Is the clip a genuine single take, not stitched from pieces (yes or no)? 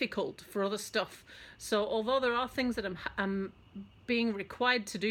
yes